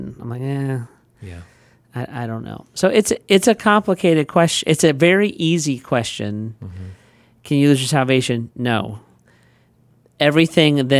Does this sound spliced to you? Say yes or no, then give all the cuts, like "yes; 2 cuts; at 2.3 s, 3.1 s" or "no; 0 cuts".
no; 0 cuts